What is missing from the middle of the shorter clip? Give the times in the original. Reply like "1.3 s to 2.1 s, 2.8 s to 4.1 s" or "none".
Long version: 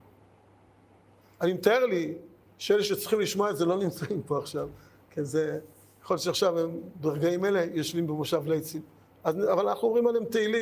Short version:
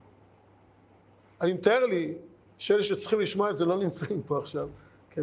none